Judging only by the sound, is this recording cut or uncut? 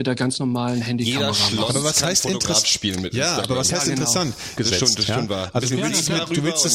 cut